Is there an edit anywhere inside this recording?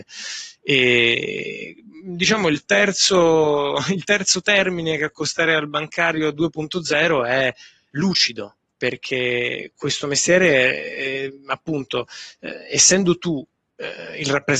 no; 0 cuts

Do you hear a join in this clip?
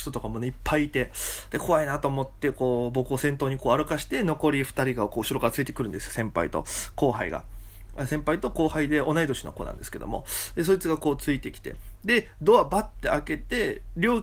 no; 0 cuts

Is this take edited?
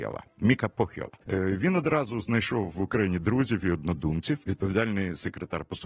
yes; 2 cuts; at 1.2 s, 4.4 s

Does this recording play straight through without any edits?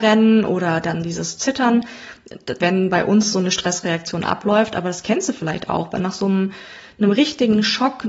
no; 1 cut; at 2.6 s

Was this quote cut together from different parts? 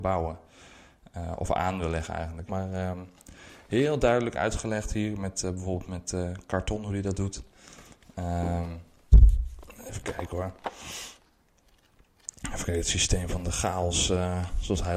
yes; 1 cut; at 2.5 s

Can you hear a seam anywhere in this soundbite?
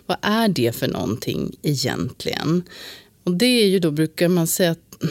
no; 0 cuts

